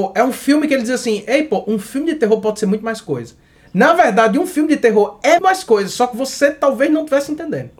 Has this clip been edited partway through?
yes; 1 cut; at 5.4 s

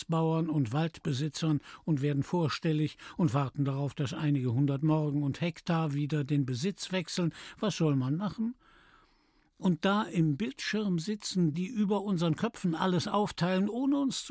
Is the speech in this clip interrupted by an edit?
yes; 1 cut; at 11.5 s

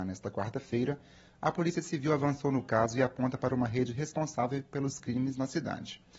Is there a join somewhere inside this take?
no; 0 cuts

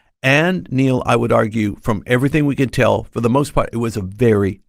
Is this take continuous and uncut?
yes; 0 cuts

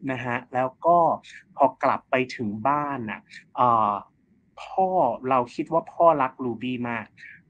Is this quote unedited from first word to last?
yes; 0 cuts

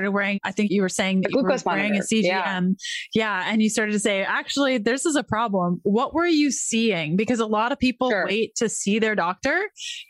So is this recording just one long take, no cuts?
yes; 0 cuts

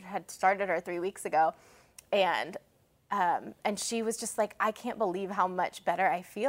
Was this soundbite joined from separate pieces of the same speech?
no; 0 cuts

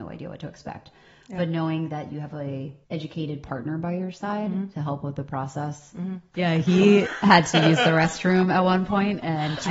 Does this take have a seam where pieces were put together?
yes; 2 cuts; at 2.8 s, 6.3 s

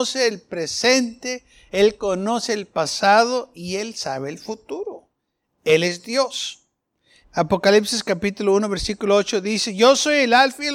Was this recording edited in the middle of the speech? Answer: yes; 1 cut; at 7.2 s

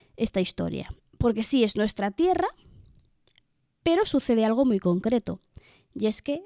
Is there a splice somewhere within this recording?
yes; 1 cut; at 1.0 s

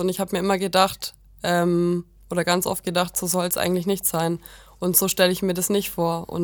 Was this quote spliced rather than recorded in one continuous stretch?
no; 0 cuts

